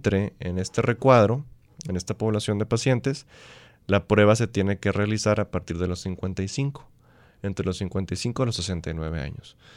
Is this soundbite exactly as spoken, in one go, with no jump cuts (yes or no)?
yes